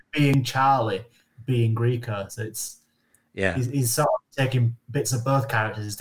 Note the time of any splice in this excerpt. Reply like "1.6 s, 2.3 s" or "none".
none